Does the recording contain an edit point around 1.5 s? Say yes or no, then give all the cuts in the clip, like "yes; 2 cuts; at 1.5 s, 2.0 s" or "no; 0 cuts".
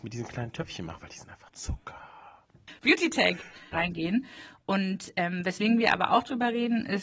yes; 2 cuts; at 1.5 s, 3.7 s